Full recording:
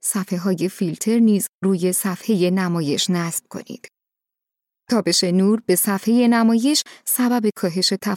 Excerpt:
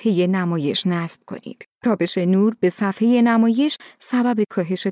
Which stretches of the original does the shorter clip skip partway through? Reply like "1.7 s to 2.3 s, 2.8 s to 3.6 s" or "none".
4.0 s to 4.8 s